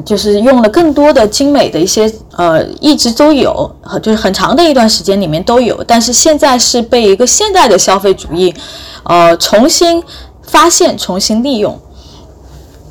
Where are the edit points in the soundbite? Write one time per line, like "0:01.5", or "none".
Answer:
0:02.3